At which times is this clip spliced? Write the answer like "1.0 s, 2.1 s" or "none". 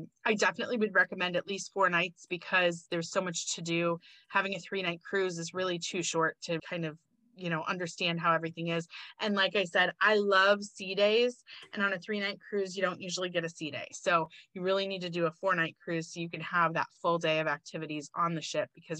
6.6 s